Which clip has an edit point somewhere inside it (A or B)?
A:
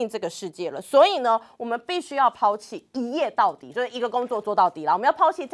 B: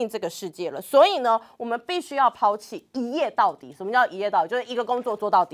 A